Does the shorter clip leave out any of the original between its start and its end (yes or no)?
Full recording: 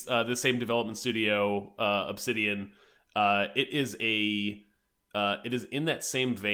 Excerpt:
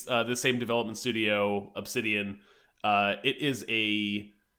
yes